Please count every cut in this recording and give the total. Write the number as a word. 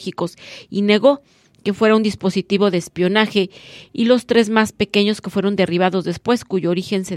zero